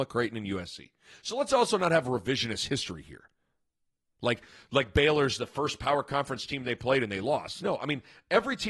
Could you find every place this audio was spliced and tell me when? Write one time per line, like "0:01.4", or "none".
none